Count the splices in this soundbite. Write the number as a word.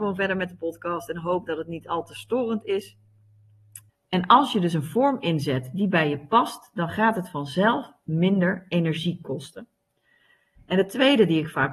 one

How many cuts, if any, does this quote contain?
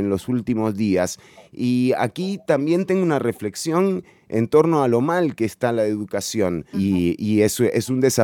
one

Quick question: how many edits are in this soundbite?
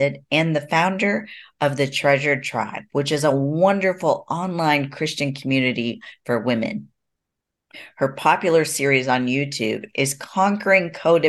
zero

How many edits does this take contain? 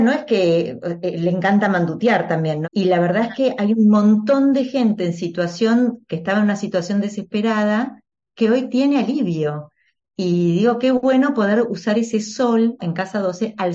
three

